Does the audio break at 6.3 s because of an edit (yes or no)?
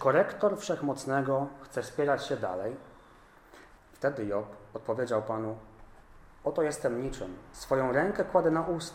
no